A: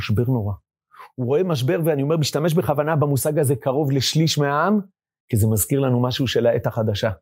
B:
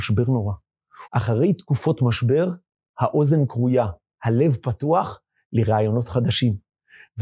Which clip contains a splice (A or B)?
B